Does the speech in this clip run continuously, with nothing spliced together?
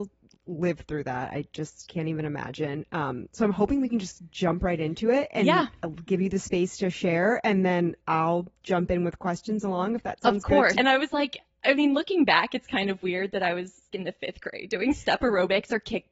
no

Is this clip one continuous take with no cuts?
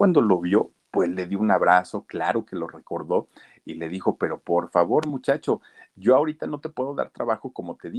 yes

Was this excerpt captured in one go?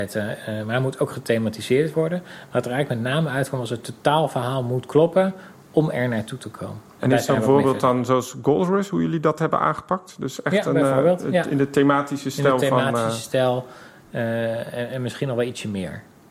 yes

